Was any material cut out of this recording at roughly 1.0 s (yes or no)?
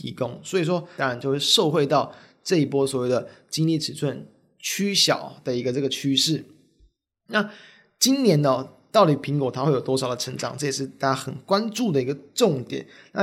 yes